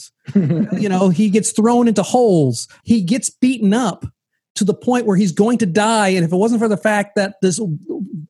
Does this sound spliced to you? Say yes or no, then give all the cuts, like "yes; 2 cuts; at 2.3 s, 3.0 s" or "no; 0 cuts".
yes; 1 cut; at 2.8 s